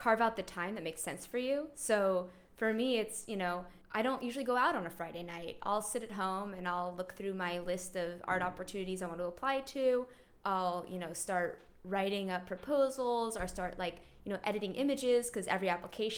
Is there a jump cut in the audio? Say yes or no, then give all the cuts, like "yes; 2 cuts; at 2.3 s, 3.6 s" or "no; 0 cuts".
yes; 1 cut; at 3.8 s